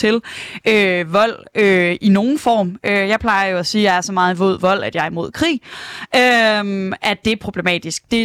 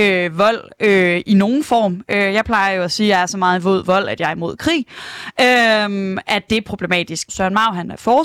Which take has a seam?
second; 1 cut; at 7.3 s

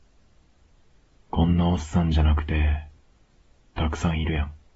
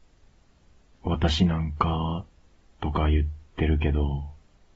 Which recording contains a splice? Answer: first; 1 cut; at 3.6 s

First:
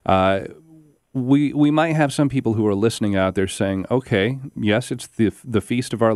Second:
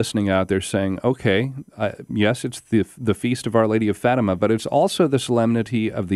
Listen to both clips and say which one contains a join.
first; 1 cut; at 4.5 s

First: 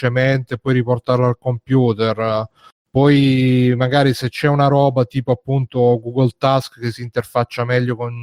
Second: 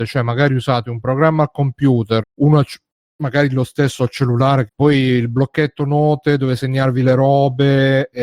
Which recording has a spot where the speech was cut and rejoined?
second; 2 cuts; at 2.2 s, 4.7 s

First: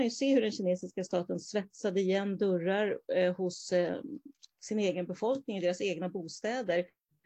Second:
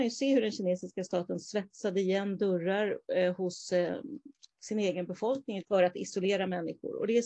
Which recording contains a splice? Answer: second; 1 cut; at 5.6 s

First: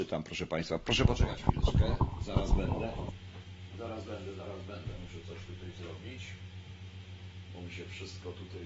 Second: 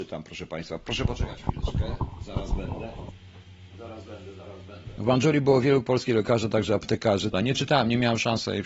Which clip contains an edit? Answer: second; 2 cuts; at 5.0 s, 7.3 s

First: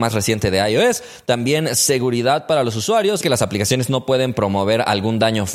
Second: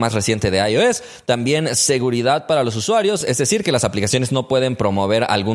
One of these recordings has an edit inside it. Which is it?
first; 1 cut; at 3.2 s

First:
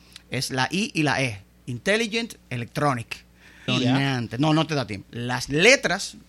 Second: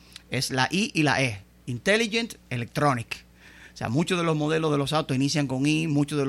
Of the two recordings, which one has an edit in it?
first; 2 cuts; at 3.7 s, 5.0 s

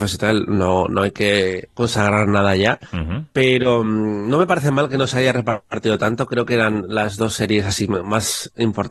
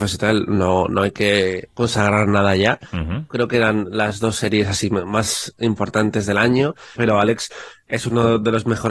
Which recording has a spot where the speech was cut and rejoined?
second; 2 cuts; at 3.3 s, 7.0 s

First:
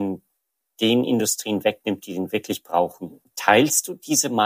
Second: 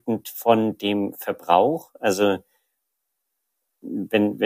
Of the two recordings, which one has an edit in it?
first; 1 cut; at 3.2 s

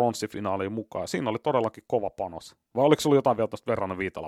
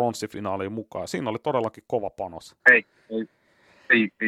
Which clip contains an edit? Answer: second; 1 cut; at 2.6 s

